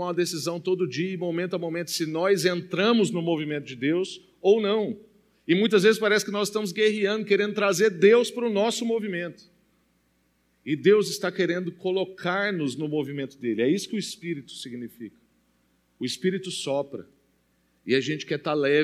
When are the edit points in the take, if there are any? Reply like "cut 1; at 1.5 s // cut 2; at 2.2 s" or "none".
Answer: none